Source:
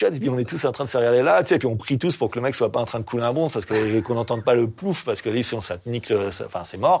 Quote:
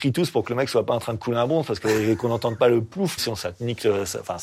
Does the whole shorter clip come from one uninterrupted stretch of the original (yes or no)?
no